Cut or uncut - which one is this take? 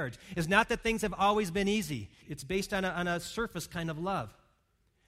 cut